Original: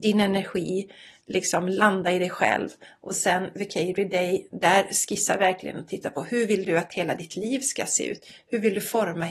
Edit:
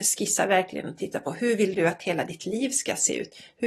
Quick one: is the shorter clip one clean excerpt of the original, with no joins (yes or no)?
yes